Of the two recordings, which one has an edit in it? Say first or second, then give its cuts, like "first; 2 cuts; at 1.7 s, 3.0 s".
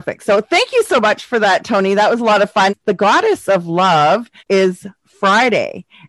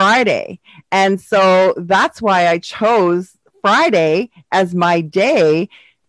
first; 2 cuts; at 2.7 s, 4.4 s